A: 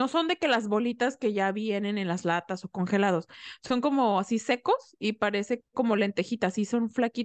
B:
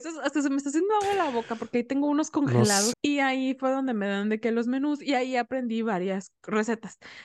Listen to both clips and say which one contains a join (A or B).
B